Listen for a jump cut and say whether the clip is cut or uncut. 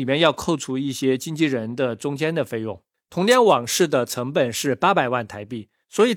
uncut